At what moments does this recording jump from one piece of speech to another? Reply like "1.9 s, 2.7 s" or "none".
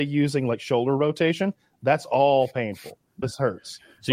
3.2 s